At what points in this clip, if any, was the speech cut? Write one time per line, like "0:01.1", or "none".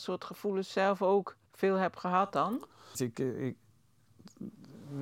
0:01.5
0:02.9